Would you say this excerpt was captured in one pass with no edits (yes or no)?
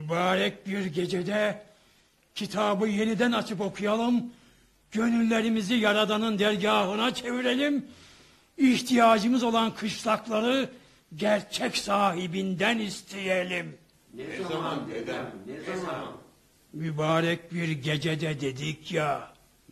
yes